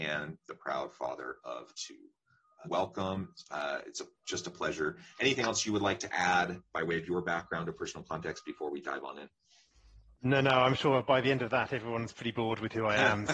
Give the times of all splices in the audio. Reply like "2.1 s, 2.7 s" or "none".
2.6 s

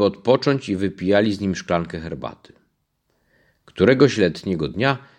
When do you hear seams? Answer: none

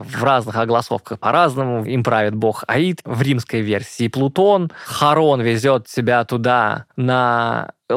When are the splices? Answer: 6.9 s

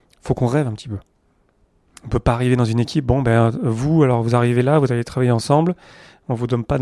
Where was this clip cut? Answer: 1.9 s

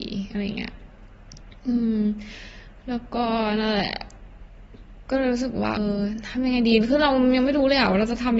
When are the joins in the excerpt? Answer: 5.8 s

